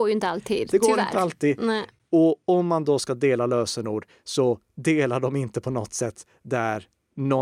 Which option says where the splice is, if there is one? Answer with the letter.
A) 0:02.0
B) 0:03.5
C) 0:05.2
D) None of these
D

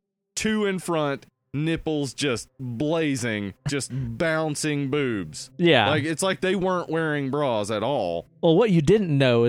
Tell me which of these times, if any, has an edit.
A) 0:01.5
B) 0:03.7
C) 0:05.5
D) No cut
B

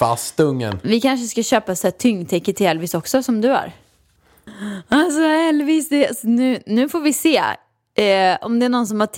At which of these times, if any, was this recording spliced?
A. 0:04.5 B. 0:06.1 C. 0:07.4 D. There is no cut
A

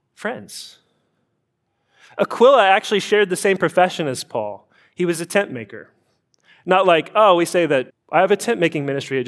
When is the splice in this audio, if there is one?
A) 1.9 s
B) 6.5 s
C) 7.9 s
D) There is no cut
C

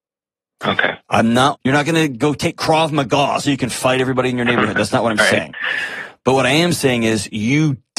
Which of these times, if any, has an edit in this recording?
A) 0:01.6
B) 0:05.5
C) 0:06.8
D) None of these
A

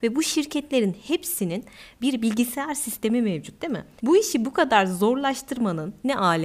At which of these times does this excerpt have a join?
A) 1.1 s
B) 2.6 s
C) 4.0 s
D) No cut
C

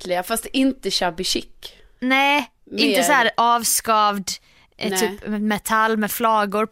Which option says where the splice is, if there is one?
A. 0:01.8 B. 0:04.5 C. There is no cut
C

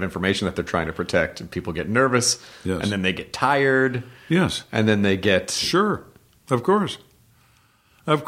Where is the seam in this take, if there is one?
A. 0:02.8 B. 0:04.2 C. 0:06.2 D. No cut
D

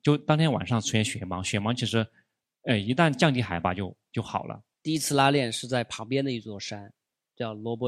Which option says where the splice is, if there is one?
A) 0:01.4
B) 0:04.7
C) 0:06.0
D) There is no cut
B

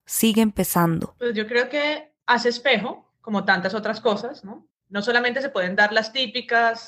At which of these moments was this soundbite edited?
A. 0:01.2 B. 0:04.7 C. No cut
B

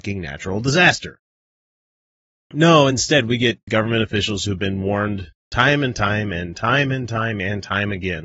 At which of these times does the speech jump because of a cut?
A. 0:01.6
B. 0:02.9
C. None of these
C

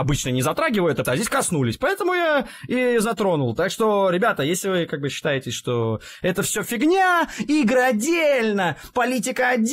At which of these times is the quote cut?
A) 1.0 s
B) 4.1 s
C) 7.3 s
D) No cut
A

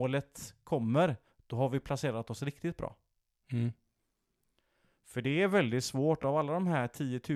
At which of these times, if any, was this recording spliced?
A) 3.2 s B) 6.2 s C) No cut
C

